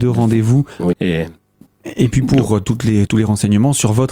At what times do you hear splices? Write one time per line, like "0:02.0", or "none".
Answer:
0:00.9